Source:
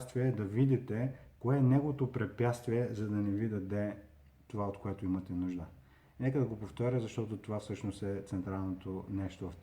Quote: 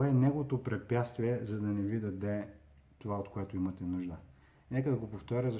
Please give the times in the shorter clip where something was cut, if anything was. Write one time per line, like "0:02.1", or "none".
none